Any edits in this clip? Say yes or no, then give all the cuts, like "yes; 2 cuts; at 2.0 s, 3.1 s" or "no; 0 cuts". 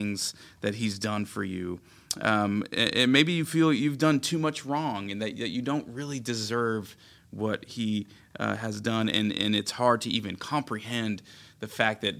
no; 0 cuts